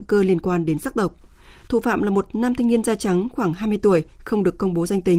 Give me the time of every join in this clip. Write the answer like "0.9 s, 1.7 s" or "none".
none